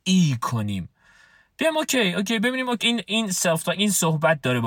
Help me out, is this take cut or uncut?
cut